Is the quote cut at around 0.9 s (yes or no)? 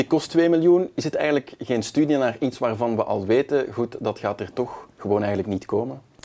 no